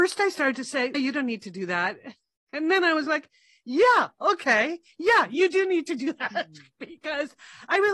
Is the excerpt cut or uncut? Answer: cut